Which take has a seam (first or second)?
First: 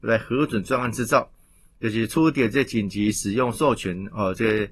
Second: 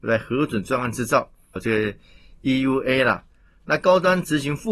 second